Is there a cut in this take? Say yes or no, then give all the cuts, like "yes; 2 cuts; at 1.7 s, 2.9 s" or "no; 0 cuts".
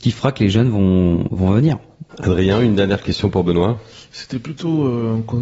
yes; 1 cut; at 2.1 s